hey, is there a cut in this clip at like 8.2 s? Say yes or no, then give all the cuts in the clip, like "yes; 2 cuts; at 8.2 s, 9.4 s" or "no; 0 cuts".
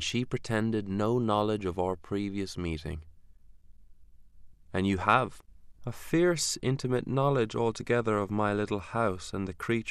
no; 2 cuts; at 4.5 s, 5.8 s